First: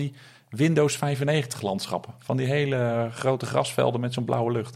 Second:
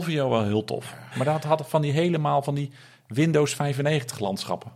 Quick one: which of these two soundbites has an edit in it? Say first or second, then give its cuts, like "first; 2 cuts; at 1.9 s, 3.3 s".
second; 1 cut; at 1.1 s